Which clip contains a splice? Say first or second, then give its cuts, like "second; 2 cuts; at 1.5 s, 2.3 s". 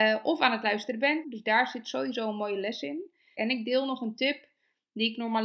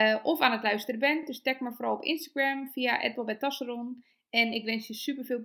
first; 2 cuts; at 1.2 s, 3.3 s